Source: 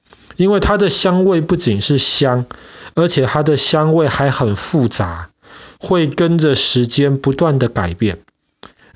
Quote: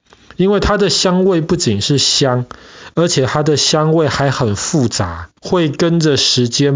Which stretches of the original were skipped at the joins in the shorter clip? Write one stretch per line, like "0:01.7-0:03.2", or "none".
0:05.4-0:05.8